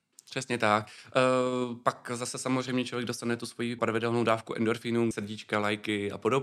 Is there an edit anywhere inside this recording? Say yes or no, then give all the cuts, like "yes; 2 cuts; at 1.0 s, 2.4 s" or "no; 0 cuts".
yes; 2 cuts; at 3.8 s, 5.1 s